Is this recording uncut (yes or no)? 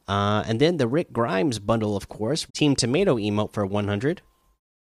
no